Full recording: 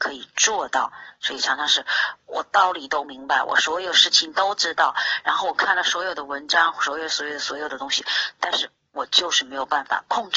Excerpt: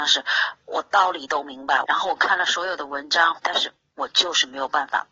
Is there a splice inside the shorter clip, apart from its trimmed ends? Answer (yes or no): yes